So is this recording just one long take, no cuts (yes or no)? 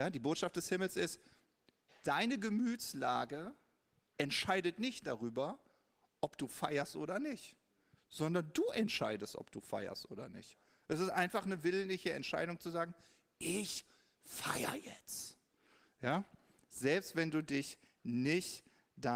yes